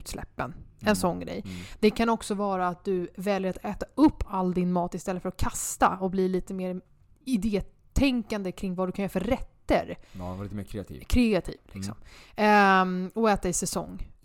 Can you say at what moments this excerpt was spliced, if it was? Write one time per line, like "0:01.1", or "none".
none